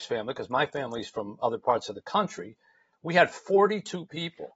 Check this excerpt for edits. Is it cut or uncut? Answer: cut